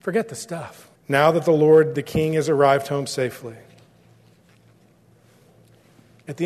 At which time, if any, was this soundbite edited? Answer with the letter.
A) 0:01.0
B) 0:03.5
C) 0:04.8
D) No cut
A